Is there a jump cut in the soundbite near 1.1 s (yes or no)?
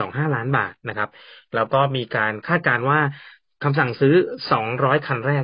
no